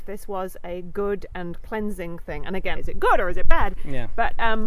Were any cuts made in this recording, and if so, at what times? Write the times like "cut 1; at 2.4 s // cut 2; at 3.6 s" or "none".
cut 1; at 2.7 s